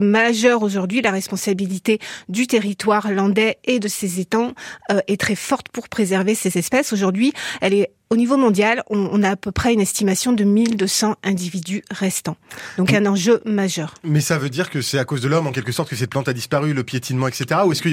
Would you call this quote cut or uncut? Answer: uncut